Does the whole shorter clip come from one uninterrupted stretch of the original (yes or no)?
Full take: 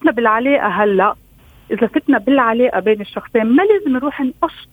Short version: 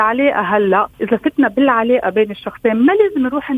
no